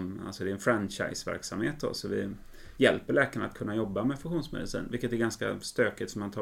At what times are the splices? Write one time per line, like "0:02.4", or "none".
none